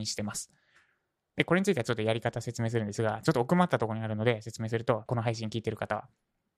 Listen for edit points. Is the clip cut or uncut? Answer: cut